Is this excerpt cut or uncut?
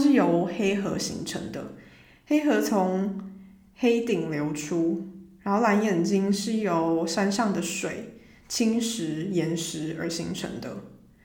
uncut